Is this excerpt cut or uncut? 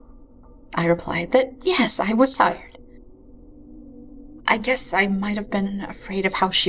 cut